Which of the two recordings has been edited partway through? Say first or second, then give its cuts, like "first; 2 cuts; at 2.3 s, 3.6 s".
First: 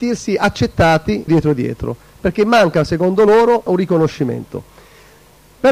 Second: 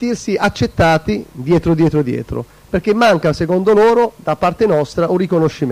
first; 2 cuts; at 1.3 s, 3.7 s